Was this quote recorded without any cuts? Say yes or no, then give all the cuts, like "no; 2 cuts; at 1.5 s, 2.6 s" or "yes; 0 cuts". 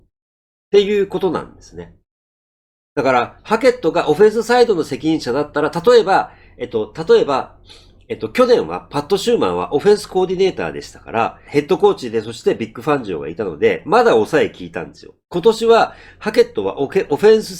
no; 2 cuts; at 11.4 s, 15.2 s